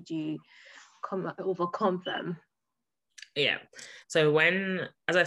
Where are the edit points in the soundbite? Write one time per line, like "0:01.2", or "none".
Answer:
0:04.0